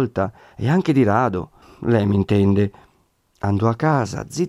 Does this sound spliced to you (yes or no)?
yes